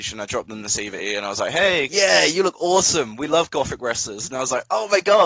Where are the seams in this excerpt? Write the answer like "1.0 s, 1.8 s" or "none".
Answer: 1.9 s